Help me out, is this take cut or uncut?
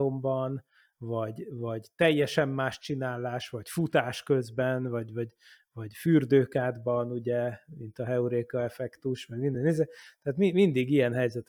uncut